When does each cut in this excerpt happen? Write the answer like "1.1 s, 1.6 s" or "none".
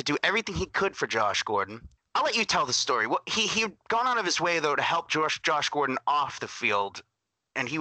2.0 s